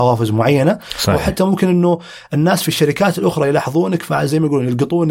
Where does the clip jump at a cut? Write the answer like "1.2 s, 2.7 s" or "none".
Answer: none